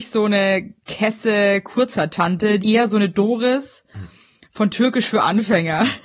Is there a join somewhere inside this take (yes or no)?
yes